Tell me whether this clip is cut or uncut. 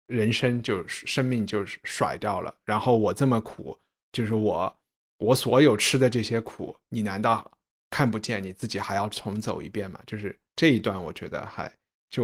uncut